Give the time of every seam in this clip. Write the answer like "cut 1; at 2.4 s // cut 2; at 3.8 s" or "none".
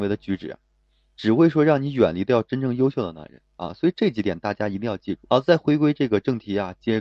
cut 1; at 5.3 s